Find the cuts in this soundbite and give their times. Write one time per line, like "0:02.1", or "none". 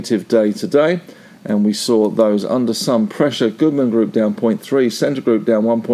none